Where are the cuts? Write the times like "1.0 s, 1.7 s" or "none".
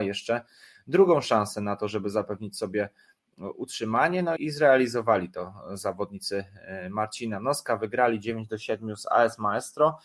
4.4 s